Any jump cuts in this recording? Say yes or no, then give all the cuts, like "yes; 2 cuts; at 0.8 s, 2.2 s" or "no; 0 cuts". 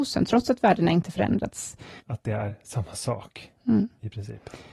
yes; 1 cut; at 2.0 s